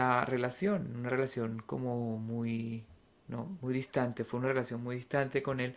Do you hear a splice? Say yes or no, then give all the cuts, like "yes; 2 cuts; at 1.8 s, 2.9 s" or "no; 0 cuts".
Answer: no; 0 cuts